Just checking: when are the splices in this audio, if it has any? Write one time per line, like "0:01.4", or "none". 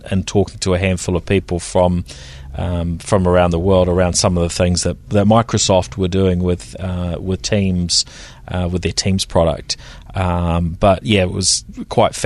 none